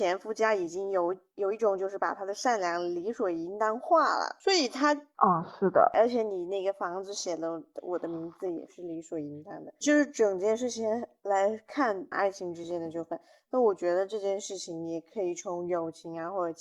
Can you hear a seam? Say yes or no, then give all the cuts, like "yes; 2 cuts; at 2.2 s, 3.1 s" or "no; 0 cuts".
yes; 2 cuts; at 5.1 s, 12.1 s